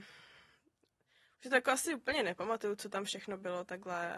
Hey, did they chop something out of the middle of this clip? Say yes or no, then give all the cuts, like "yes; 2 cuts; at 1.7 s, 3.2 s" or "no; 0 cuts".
no; 0 cuts